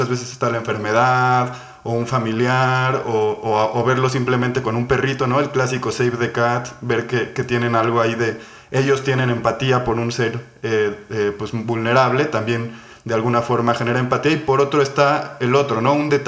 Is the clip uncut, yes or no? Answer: yes